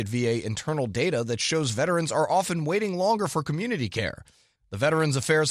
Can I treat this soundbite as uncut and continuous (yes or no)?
no